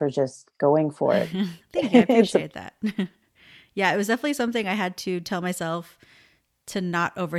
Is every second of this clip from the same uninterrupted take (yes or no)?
yes